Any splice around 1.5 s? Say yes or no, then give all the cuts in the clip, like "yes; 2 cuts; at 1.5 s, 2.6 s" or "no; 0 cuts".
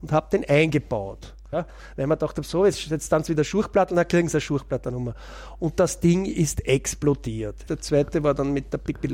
yes; 2 cuts; at 1.5 s, 7.7 s